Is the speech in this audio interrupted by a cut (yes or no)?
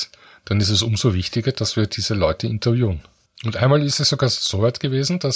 yes